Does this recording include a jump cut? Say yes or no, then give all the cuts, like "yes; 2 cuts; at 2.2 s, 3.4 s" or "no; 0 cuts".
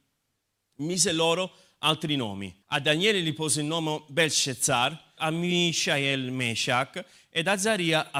yes; 2 cuts; at 2.6 s, 5.2 s